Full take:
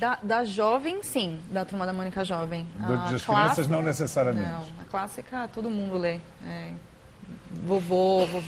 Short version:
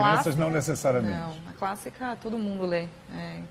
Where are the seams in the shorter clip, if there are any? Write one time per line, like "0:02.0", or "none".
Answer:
none